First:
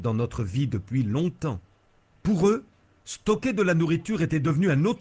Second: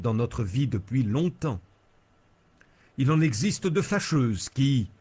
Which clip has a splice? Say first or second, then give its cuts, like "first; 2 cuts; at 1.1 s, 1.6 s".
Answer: first; 1 cut; at 2.1 s